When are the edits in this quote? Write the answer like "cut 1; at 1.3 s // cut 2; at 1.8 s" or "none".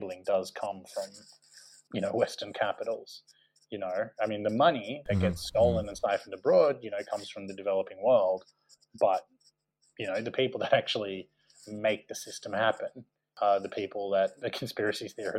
none